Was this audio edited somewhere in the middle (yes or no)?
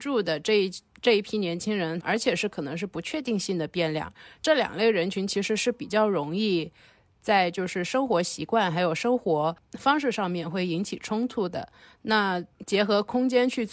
yes